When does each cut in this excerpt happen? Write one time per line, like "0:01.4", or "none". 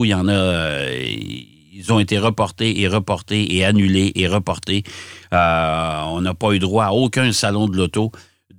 none